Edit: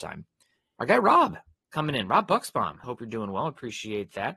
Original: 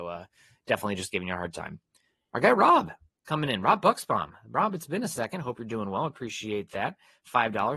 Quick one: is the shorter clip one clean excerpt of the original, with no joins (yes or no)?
no